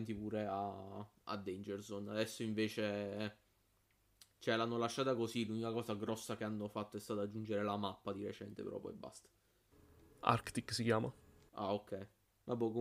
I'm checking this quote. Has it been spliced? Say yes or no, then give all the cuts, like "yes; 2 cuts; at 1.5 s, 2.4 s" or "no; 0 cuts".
no; 0 cuts